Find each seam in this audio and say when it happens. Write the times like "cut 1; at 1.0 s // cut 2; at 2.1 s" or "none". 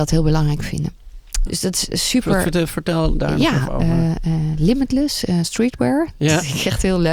cut 1; at 1.5 s